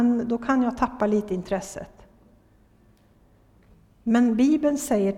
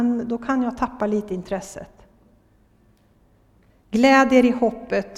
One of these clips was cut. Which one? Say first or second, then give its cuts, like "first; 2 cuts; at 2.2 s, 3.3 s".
second; 1 cut; at 3.7 s